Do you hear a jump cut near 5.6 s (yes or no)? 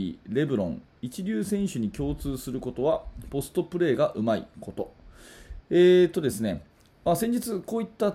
yes